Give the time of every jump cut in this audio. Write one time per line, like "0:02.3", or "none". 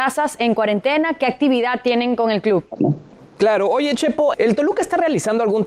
0:02.8
0:04.3